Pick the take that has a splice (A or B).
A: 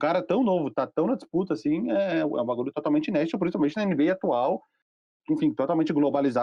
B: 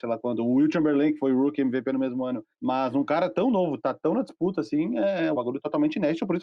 B